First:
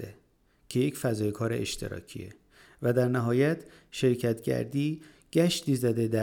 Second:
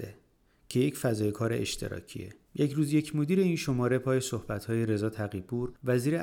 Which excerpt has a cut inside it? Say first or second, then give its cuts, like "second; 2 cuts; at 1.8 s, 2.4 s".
second; 1 cut; at 2.4 s